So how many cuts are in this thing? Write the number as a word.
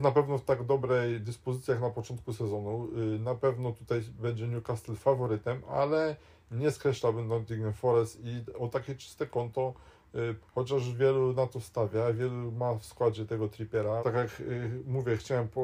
two